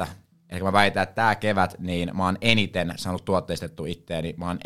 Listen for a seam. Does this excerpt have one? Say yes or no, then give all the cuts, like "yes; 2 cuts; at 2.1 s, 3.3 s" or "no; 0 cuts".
no; 0 cuts